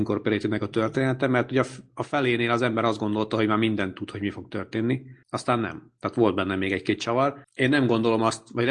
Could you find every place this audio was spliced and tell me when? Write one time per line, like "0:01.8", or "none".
0:05.2
0:07.4